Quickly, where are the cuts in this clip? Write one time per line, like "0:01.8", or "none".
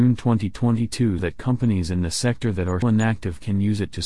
0:01.2
0:02.8